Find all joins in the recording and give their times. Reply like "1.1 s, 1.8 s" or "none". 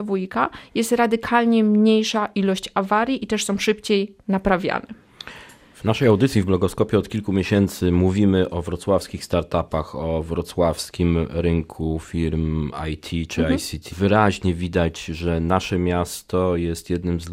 13.9 s